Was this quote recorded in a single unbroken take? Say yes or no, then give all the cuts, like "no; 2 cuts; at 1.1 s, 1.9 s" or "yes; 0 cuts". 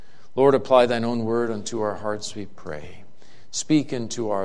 yes; 0 cuts